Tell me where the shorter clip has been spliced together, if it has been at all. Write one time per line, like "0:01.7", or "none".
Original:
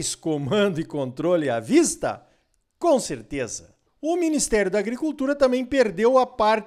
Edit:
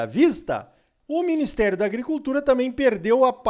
0:01.0